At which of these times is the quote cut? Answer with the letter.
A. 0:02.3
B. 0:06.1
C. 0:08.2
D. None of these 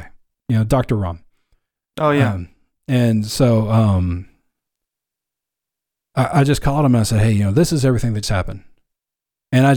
C